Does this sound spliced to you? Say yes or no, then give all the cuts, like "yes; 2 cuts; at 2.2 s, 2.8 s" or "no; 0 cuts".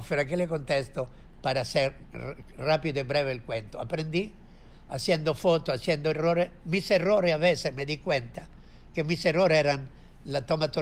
no; 0 cuts